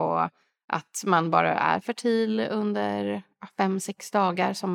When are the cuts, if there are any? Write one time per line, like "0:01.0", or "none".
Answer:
none